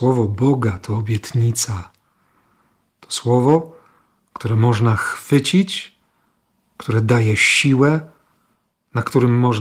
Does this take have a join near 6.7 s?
yes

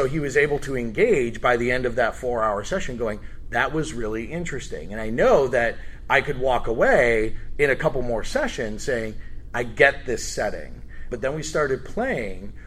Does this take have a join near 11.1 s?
yes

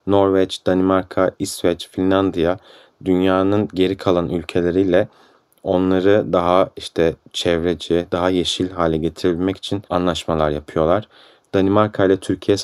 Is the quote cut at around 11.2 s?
no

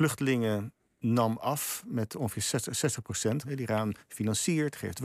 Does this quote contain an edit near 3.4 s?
yes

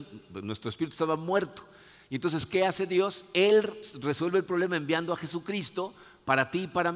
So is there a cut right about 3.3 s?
no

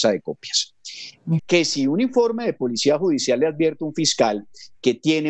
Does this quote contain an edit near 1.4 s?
yes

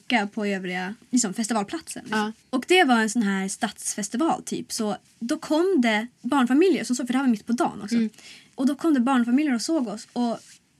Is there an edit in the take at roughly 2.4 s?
no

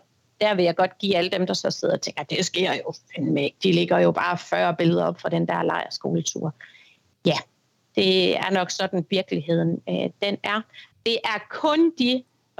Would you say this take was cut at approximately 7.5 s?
no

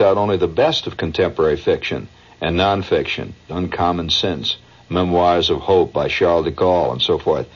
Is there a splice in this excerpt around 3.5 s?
yes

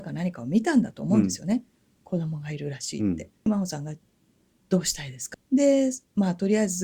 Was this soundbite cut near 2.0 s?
no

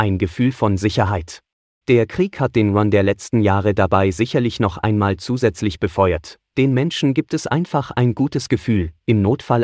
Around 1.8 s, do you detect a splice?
yes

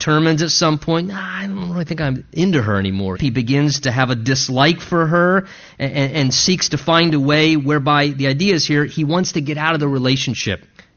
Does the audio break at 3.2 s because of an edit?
yes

